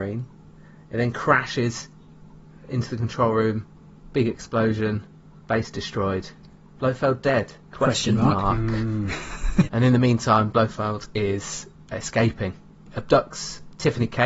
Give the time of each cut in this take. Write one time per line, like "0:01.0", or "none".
0:07.6
0:09.7